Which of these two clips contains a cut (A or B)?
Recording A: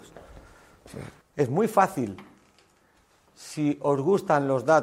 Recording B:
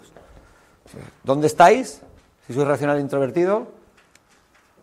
A